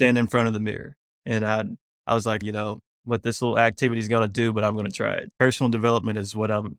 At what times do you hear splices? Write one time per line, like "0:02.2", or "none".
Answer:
0:02.4
0:05.3